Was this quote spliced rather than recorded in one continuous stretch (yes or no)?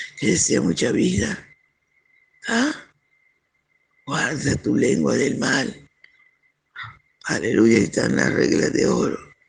no